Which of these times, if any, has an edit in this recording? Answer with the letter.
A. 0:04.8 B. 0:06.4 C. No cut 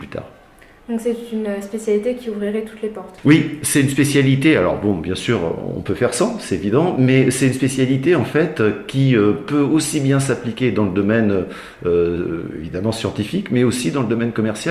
C